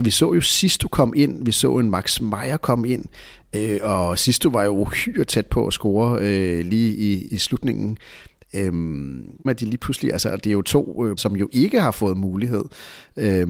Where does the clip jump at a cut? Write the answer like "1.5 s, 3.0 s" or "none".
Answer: 7.3 s, 9.5 s, 11.2 s